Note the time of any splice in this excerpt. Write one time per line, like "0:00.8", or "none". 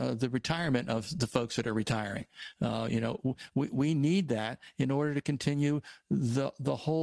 none